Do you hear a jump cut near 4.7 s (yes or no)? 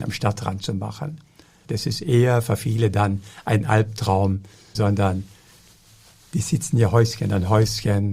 yes